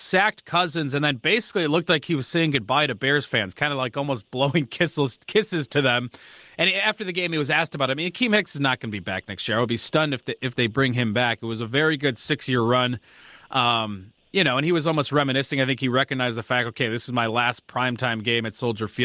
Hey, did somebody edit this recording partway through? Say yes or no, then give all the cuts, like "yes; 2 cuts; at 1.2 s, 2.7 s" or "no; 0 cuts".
no; 0 cuts